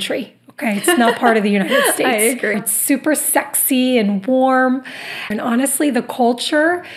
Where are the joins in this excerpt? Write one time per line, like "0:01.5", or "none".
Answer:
0:02.5
0:05.3

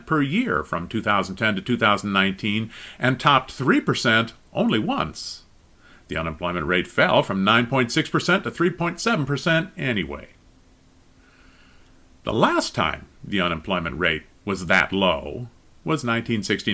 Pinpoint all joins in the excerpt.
none

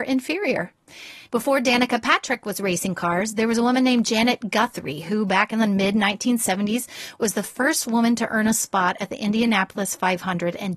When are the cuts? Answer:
0:01.2

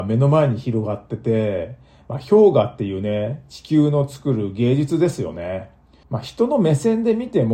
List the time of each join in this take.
0:06.0

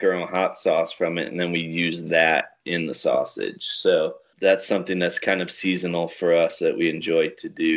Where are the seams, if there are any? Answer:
none

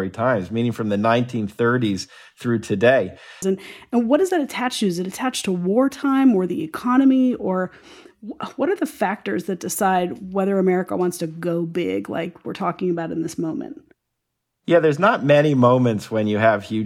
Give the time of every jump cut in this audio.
0:03.4

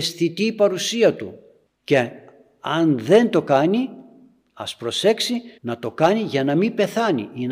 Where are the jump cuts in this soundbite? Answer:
0:01.7
0:05.6

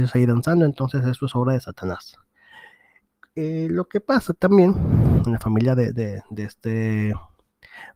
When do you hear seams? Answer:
none

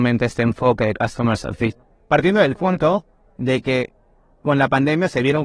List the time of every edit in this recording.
none

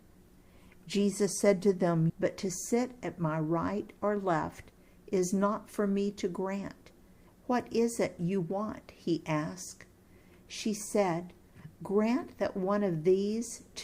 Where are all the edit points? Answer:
0:02.1
0:07.3

